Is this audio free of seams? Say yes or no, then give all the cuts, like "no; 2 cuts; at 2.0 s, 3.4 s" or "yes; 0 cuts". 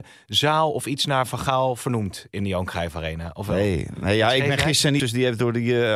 no; 1 cut; at 5.0 s